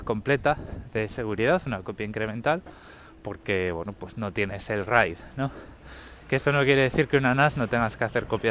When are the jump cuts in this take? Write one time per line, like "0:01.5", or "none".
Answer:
none